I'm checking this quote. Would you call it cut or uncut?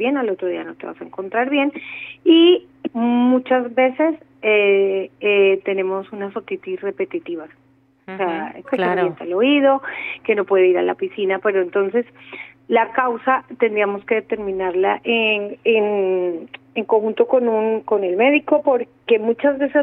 cut